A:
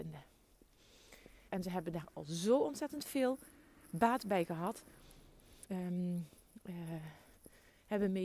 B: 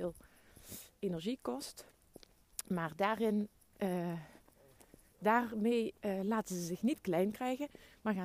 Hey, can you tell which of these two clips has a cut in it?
A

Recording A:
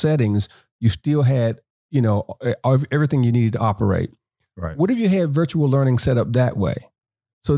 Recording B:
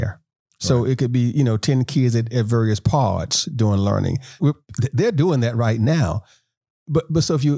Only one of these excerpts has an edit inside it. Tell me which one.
B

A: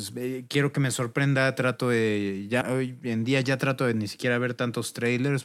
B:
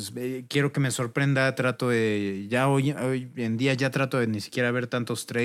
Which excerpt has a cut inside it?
A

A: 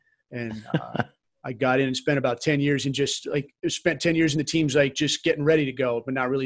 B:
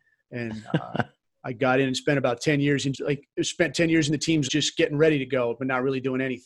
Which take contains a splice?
B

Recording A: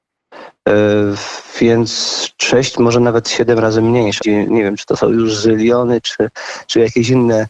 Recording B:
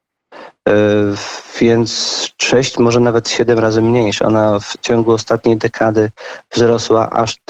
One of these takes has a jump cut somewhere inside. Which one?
A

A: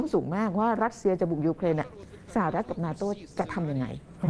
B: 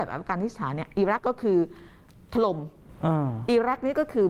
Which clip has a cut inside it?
B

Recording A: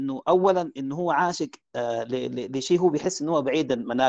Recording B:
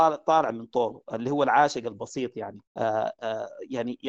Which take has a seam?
B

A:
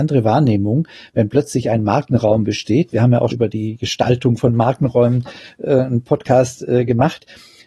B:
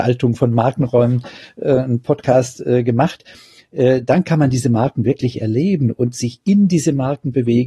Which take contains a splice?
A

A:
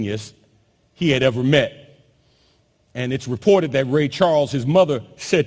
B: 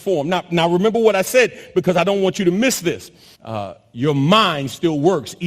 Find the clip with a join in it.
B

